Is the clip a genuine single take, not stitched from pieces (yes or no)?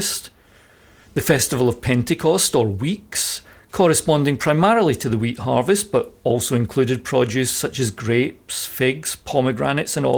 yes